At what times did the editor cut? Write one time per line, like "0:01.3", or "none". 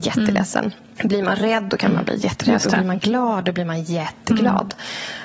none